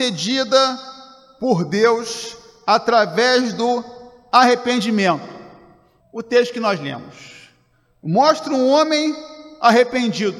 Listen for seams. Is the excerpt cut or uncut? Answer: cut